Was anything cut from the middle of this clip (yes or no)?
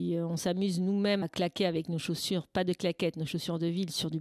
yes